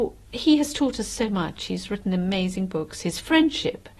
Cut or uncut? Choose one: uncut